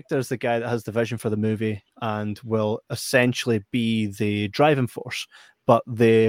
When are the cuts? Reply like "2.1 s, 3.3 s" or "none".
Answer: none